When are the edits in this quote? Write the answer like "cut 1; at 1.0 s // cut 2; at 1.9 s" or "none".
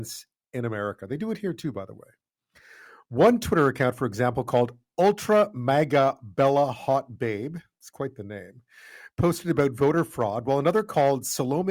none